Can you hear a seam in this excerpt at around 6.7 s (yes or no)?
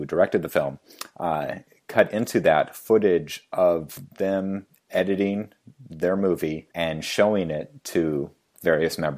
yes